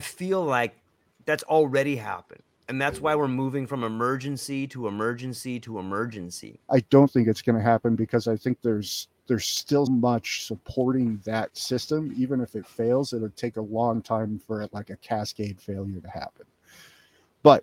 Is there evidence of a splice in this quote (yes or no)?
yes